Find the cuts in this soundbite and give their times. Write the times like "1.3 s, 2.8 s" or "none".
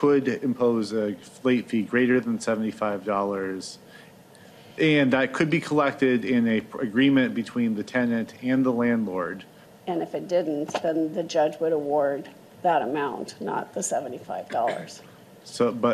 9.7 s